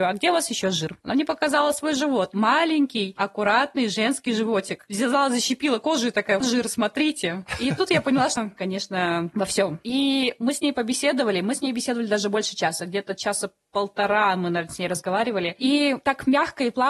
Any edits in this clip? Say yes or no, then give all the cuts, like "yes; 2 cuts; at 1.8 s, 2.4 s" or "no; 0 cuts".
yes; 2 cuts; at 6.4 s, 8.4 s